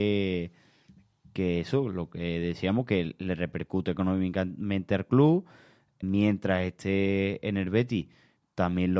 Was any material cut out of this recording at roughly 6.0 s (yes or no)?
yes